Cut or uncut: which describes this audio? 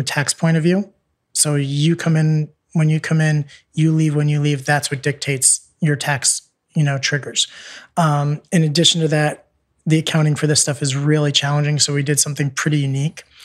uncut